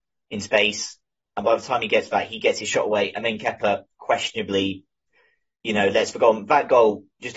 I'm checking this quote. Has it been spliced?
no; 0 cuts

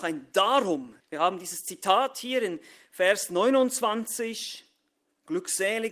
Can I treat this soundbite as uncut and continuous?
no; 1 cut; at 1.0 s

